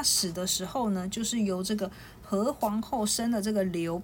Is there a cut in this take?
no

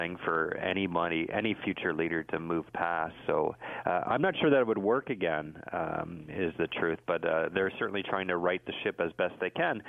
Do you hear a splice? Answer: no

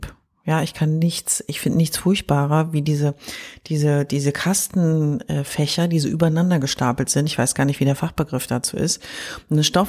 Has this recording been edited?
no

